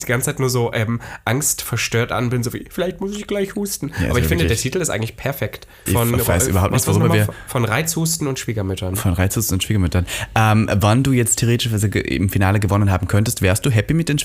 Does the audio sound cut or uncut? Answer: cut